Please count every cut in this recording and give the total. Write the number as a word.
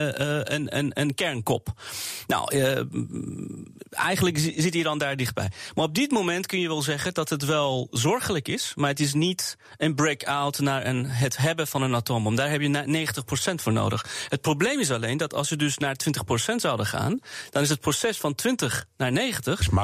zero